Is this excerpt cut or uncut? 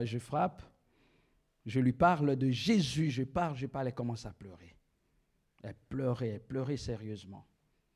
uncut